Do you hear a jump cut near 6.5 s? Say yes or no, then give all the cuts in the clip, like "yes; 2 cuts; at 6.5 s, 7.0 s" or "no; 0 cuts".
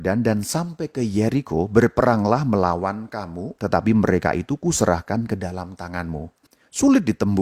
yes; 2 cuts; at 3.6 s, 6.5 s